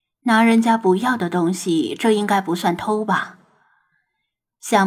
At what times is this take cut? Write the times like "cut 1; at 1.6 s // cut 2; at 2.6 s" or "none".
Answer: none